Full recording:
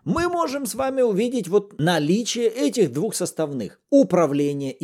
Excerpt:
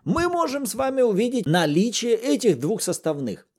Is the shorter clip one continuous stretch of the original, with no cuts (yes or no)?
no